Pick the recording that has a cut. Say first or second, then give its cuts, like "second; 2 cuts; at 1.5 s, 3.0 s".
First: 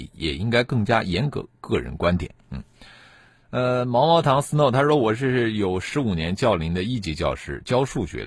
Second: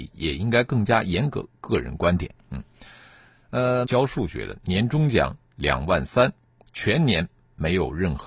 second; 1 cut; at 3.9 s